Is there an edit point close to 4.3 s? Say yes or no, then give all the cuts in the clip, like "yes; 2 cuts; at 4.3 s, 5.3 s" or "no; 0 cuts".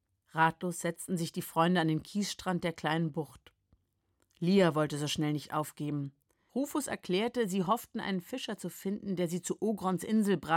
no; 1 cut; at 6.5 s